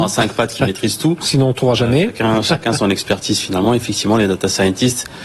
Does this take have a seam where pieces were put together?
no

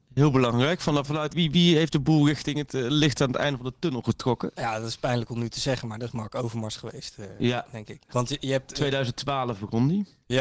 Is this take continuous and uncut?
no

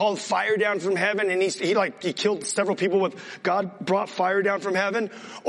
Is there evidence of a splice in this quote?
no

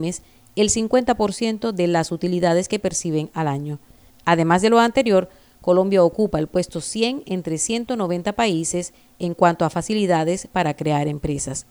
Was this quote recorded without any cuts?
yes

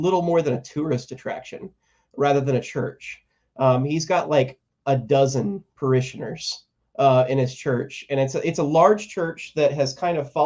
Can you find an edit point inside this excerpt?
no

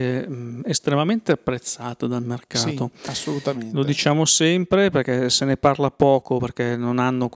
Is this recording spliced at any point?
no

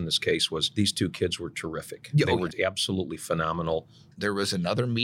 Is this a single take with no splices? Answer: no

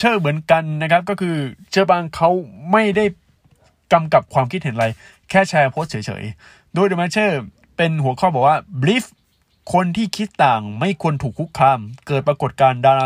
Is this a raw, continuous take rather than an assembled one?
yes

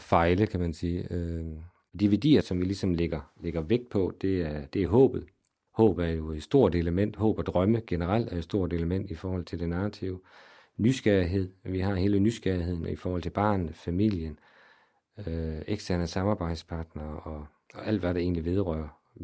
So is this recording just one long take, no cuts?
no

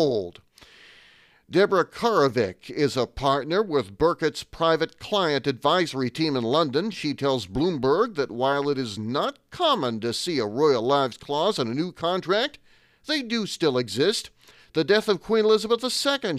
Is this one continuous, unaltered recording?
yes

